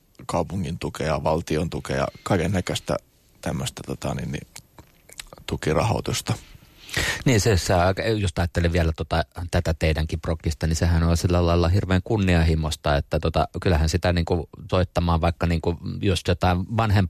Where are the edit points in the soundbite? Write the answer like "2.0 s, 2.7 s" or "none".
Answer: 14.7 s